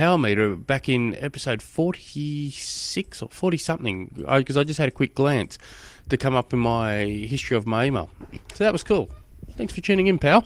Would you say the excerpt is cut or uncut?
uncut